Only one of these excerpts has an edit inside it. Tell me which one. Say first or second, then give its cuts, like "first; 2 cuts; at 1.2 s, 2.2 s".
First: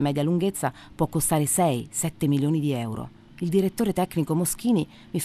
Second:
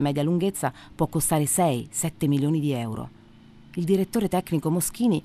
first; 1 cut; at 3.3 s